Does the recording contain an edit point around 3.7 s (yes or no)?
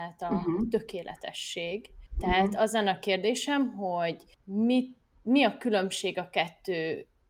no